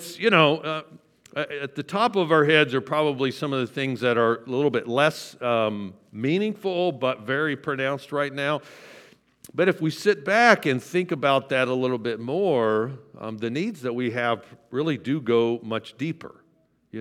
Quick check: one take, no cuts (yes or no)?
yes